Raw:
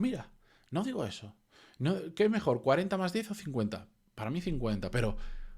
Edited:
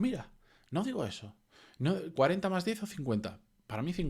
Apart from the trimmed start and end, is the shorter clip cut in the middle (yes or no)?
yes